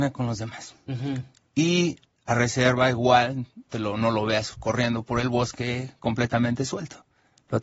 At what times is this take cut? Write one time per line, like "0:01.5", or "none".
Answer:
0:03.7